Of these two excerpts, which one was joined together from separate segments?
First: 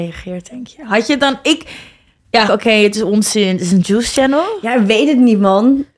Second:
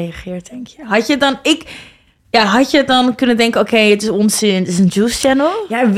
first; 1 cut; at 2.5 s

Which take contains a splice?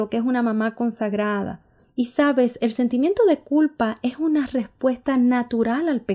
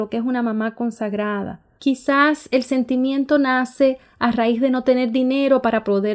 second; 1 cut; at 1.8 s

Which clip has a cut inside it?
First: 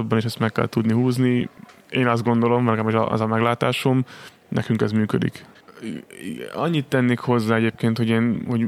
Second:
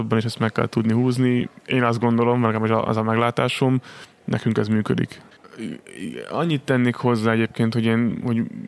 second; 1 cut; at 1.6 s

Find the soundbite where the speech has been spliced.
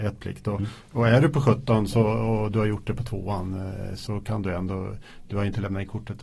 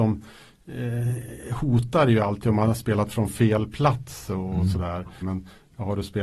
second; 1 cut; at 5.2 s

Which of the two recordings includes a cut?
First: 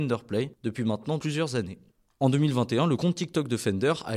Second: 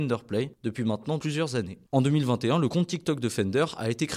second; 1 cut; at 1.9 s

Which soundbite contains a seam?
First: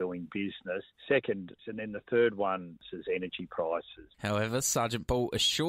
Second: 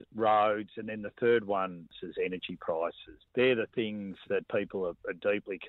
first; 2 cuts; at 1.6 s, 4.1 s

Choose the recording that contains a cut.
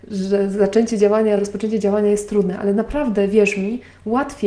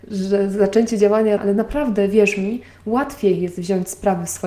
second; 1 cut; at 1.4 s

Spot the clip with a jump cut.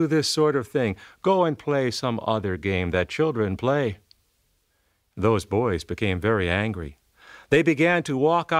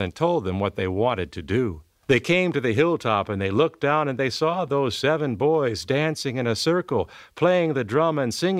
second; 1 cut; at 2.0 s

